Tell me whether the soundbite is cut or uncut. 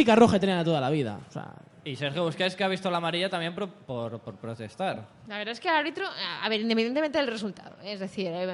uncut